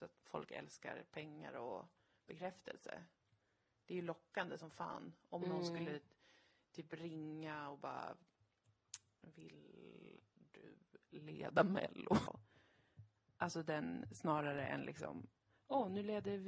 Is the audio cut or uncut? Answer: cut